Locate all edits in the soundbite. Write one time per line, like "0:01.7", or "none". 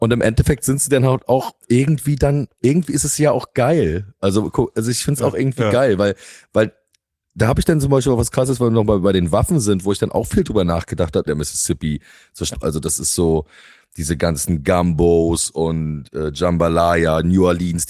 0:11.3
0:12.5